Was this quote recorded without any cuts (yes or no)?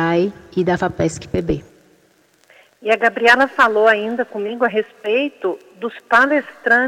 yes